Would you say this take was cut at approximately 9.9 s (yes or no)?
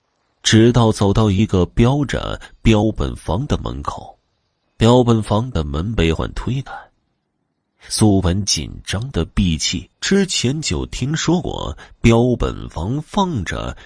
yes